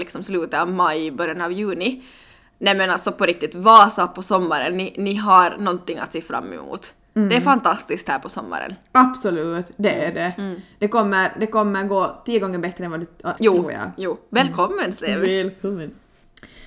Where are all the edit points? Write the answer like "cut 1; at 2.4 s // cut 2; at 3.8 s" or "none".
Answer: cut 1; at 13.4 s